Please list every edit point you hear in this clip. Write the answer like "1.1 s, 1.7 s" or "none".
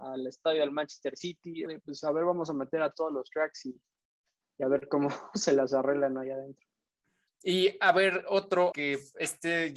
1.7 s, 7.3 s, 8.7 s